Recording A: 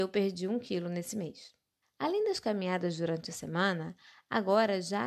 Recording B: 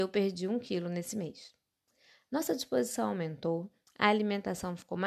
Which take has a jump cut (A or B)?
A